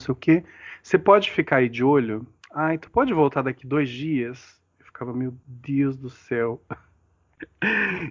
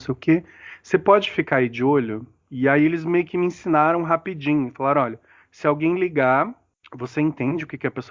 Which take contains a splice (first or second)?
first